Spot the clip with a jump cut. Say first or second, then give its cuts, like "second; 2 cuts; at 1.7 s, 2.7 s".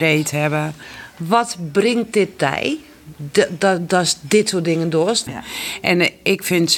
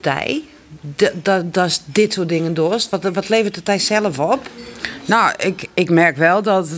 first; 1 cut; at 5.3 s